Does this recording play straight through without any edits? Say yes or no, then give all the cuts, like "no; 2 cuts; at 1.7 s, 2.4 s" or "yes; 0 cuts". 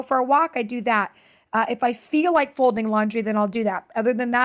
yes; 0 cuts